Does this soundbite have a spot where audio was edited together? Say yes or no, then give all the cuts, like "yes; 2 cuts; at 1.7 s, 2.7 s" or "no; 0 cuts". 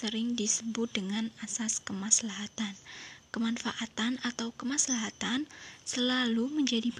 no; 0 cuts